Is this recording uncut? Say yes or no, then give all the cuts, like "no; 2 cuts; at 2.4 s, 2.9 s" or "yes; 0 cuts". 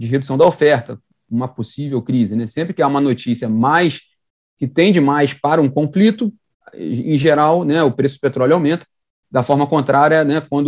yes; 0 cuts